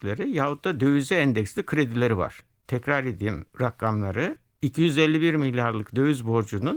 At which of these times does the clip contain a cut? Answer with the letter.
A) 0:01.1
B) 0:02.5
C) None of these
C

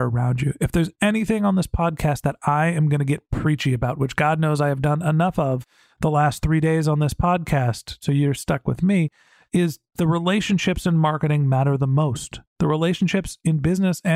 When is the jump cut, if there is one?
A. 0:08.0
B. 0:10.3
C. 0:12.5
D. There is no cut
A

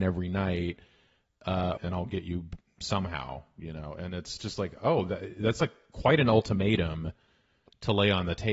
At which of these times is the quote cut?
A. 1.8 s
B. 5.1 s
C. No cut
A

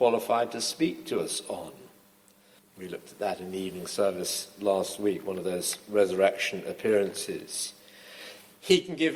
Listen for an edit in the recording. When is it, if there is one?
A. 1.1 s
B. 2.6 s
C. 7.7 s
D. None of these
B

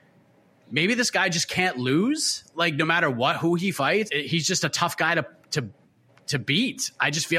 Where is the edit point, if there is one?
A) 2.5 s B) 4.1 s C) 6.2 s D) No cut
B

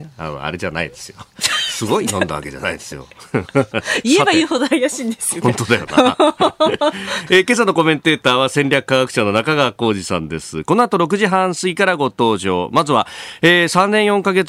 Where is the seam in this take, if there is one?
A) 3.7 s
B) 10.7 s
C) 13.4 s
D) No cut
A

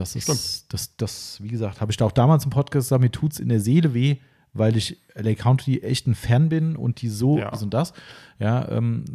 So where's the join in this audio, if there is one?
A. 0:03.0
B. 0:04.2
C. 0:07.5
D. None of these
C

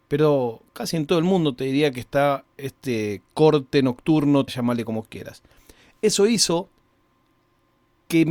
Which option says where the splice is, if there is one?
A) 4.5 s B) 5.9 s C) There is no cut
A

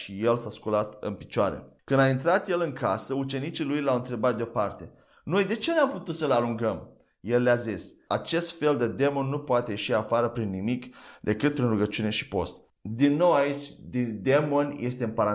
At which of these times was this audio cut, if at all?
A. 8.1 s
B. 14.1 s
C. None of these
A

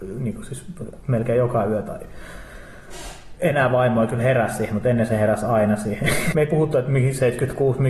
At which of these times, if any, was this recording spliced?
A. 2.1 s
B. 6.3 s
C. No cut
B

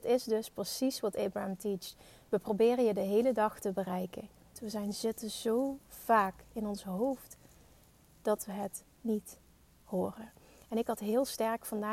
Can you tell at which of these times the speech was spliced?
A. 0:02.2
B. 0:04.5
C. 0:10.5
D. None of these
B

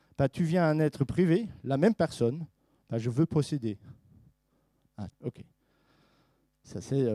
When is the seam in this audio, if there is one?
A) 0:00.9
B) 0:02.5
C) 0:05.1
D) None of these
C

